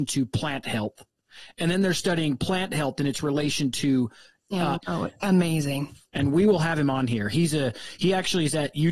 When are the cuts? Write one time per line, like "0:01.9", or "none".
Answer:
0:04.8